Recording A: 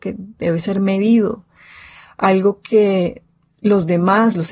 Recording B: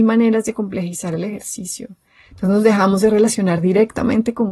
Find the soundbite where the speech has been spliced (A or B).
B